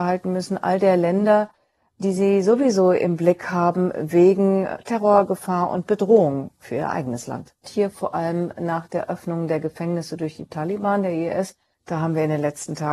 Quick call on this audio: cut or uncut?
cut